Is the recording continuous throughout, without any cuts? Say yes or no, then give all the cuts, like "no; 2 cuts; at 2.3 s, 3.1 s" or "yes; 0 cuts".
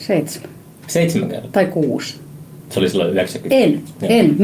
no; 1 cut; at 2.6 s